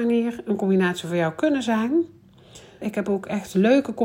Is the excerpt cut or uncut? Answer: cut